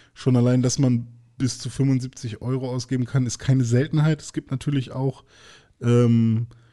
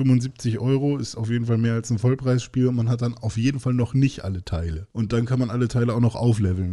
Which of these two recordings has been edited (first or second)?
second